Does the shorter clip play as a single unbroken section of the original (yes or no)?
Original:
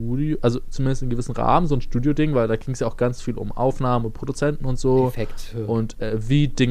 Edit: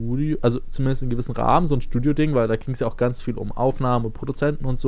yes